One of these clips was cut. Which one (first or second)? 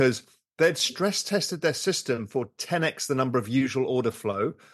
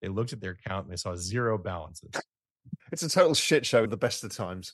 second